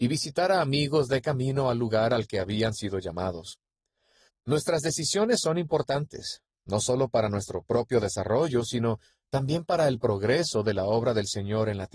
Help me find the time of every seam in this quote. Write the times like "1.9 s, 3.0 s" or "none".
4.3 s